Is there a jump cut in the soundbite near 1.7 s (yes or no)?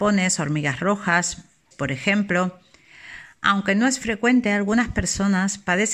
yes